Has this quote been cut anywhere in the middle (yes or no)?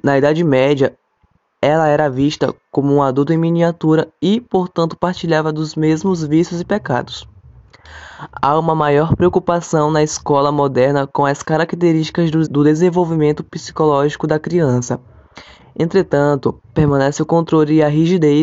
yes